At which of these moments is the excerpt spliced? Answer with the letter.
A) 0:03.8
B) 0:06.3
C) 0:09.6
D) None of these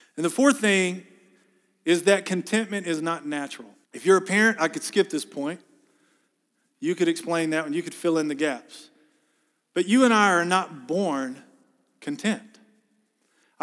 A